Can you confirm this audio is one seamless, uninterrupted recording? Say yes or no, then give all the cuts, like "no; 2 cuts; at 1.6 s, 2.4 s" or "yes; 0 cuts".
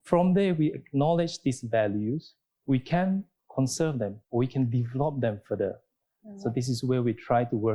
no; 2 cuts; at 2.6 s, 4.2 s